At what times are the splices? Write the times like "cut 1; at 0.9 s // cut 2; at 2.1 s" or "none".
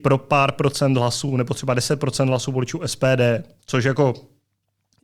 none